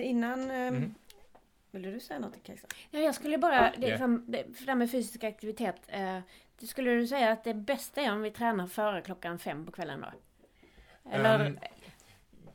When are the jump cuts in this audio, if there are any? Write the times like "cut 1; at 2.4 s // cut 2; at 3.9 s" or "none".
none